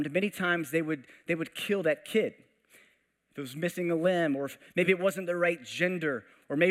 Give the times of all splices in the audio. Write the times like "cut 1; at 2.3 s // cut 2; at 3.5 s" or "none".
none